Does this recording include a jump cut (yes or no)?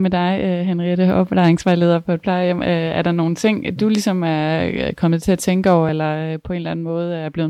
no